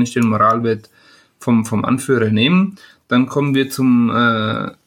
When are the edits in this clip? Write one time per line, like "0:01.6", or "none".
none